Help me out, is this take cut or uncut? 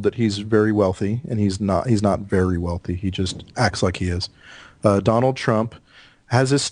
uncut